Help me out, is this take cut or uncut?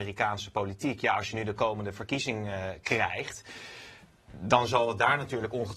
uncut